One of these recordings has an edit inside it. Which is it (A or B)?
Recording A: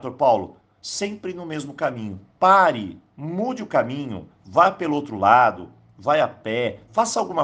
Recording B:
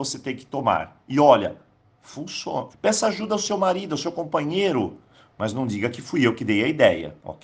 B